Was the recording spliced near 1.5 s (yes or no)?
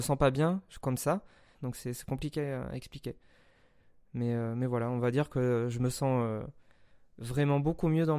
yes